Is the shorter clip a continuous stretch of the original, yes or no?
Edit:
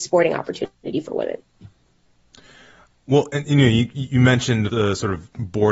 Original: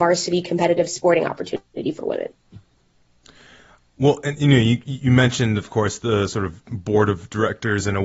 no